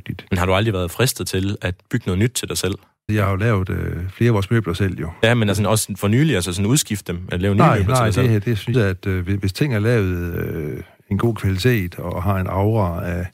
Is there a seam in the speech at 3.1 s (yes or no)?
yes